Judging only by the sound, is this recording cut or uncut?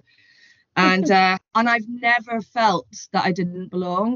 cut